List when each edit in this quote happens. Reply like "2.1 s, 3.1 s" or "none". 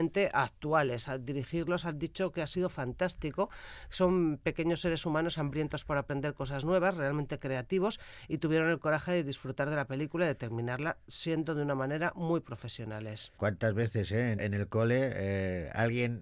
13.4 s, 14.4 s